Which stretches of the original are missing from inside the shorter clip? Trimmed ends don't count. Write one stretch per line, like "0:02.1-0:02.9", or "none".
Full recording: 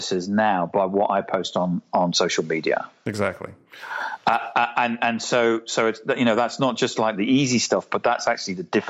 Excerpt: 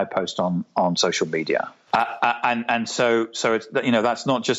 0:03.0-0:04.2